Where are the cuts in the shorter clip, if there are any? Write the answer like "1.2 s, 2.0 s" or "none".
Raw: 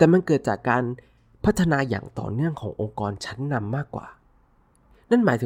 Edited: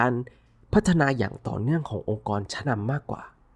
2.6 s